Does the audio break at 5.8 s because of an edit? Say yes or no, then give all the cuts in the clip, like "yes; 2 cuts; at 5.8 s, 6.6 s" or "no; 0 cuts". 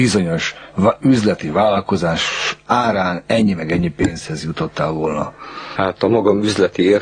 yes; 1 cut; at 5.8 s